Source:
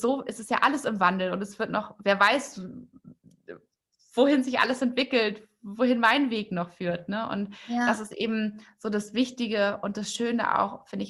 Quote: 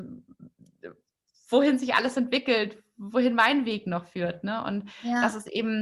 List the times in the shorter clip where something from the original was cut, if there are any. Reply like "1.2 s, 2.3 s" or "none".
none